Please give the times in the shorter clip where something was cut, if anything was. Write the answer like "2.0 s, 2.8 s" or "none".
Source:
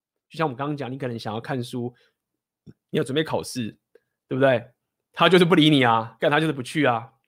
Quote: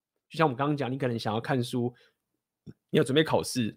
none